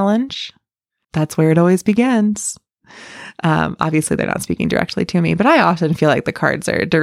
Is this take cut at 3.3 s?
no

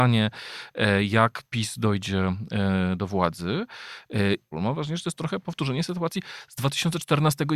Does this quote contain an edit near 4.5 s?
yes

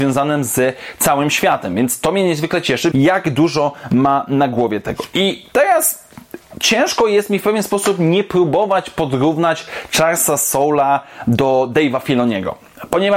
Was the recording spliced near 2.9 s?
yes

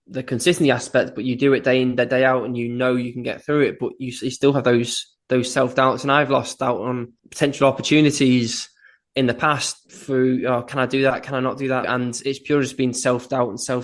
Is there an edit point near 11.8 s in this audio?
yes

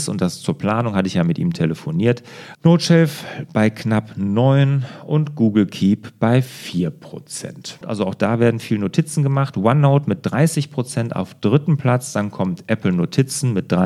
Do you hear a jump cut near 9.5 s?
no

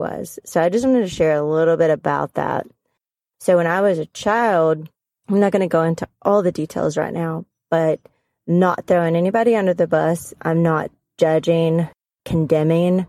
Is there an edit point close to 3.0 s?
no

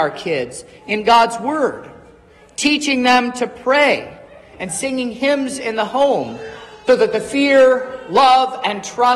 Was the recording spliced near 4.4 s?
no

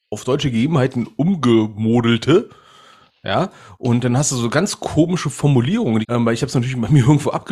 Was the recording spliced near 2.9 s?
no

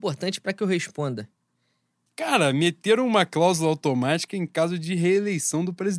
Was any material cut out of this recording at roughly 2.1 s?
yes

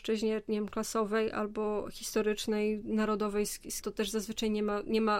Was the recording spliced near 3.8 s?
yes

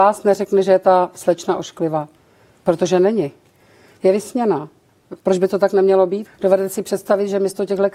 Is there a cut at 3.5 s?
no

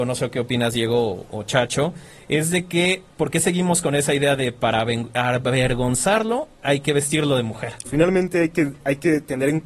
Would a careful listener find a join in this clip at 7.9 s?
yes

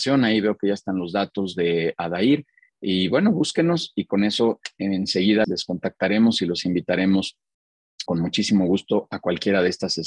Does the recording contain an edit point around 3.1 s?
no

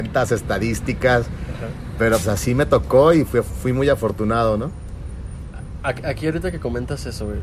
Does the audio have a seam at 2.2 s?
yes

